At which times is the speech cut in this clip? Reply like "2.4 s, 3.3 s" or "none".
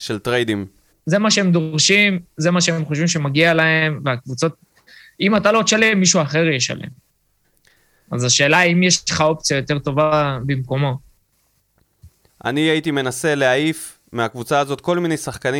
0.9 s, 12.3 s